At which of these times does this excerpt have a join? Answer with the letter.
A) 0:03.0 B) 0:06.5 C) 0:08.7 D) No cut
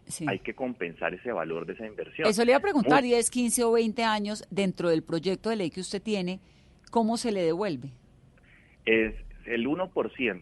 A